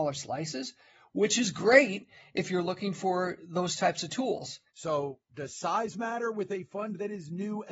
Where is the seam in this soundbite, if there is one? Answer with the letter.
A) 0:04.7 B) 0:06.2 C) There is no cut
A